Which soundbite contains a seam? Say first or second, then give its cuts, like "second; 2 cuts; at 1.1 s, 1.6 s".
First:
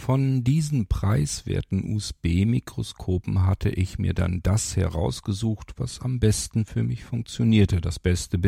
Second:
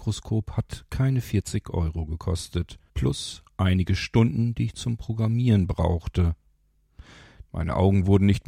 second; 2 cuts; at 2.9 s, 7.5 s